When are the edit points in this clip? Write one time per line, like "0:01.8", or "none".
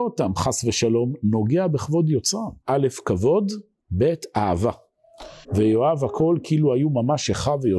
0:02.6
0:05.4